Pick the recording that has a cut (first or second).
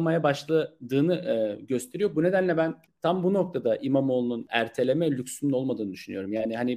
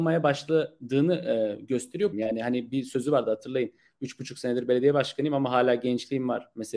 second